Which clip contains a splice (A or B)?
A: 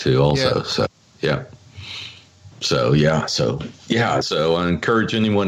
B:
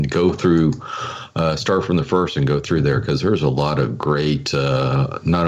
A